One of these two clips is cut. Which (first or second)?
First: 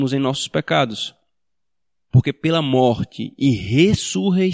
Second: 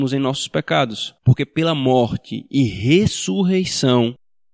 second